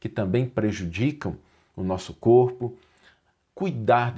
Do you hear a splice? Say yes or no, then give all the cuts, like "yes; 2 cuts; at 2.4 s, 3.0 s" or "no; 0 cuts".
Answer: no; 0 cuts